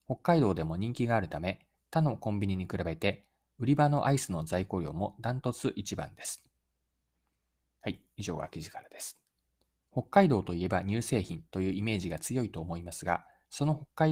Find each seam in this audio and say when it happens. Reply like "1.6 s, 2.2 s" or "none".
9.7 s